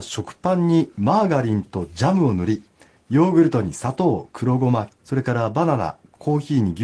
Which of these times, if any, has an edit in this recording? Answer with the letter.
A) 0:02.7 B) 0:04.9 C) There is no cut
B